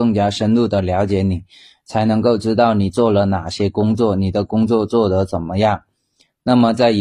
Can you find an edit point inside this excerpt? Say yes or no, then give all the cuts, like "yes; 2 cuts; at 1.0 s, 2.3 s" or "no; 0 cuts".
no; 0 cuts